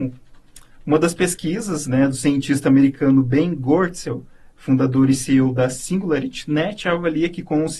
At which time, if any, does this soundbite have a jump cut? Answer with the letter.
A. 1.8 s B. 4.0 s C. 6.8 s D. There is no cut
D